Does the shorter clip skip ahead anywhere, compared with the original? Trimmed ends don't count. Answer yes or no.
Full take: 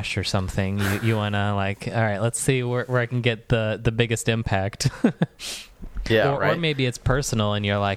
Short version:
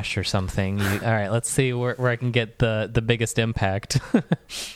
yes